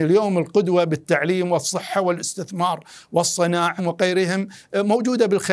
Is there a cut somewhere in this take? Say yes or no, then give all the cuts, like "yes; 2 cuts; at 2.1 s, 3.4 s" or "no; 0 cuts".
yes; 1 cut; at 3.8 s